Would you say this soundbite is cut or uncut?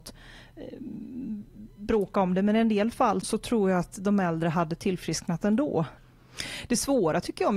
cut